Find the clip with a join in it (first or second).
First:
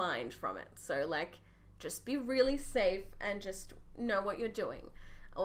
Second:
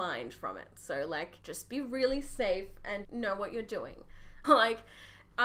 second